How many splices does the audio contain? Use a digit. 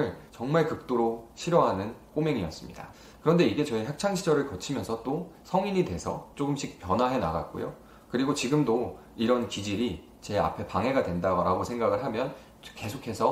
0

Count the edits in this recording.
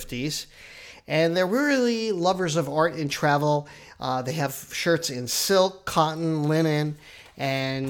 0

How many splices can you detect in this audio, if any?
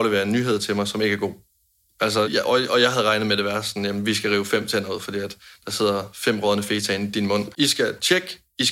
2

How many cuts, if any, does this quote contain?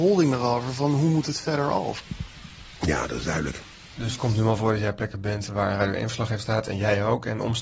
0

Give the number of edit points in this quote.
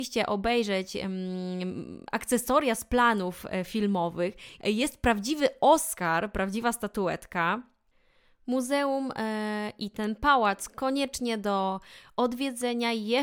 1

